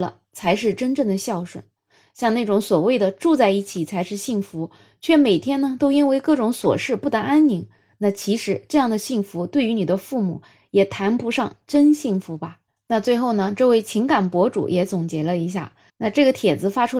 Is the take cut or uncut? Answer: cut